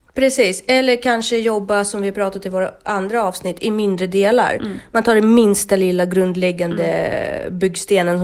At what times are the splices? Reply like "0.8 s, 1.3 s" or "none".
none